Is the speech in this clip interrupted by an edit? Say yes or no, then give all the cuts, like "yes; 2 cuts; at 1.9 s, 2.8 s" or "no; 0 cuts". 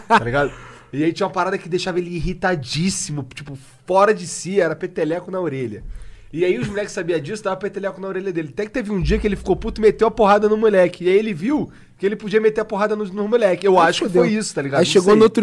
no; 0 cuts